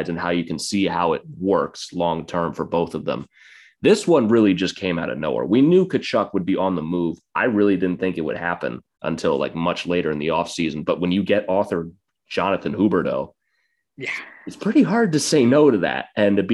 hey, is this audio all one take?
yes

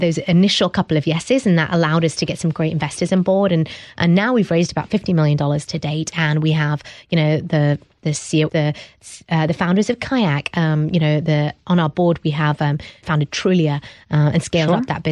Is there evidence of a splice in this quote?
yes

